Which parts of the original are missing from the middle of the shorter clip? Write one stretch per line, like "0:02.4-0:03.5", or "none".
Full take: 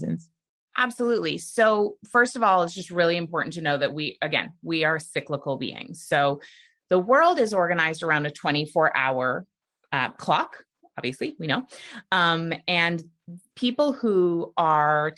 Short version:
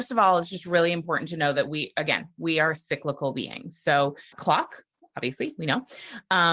0:06.6-0:10.1